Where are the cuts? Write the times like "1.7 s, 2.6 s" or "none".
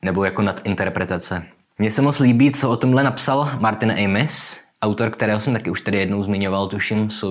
1.8 s